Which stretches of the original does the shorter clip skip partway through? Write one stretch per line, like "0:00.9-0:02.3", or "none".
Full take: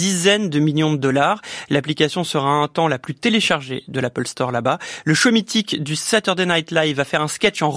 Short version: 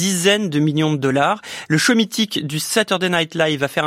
0:01.7-0:05.0